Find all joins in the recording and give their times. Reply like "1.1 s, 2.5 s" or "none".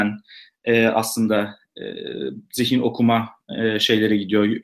none